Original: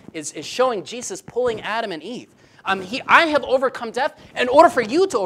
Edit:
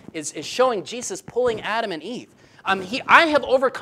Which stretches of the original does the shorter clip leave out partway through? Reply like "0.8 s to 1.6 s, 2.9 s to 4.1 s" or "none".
none